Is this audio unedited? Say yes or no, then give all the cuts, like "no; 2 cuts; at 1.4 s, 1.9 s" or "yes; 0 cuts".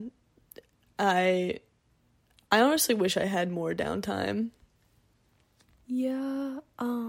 yes; 0 cuts